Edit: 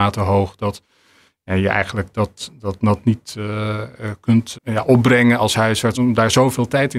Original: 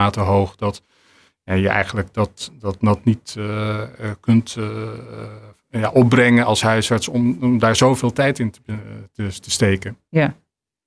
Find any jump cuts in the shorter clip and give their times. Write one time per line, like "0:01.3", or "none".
0:04.5
0:05.9